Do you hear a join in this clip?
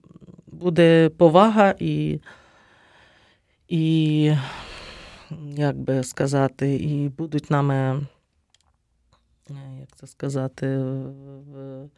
no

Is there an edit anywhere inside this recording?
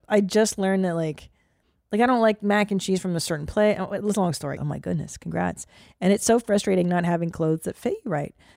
yes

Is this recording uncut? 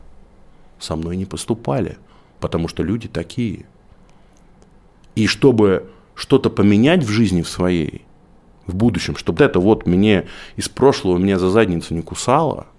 no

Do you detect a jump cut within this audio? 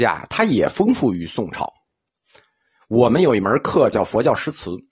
no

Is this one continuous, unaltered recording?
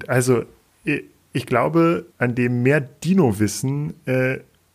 no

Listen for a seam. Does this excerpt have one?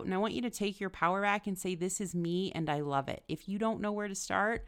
no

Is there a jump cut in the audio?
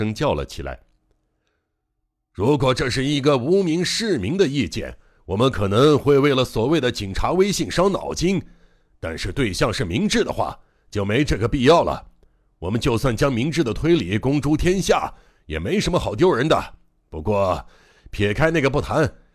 no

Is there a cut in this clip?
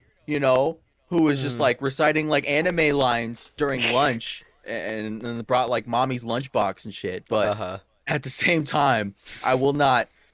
no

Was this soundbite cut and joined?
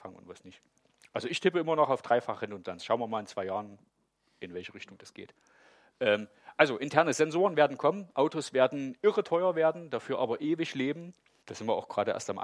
yes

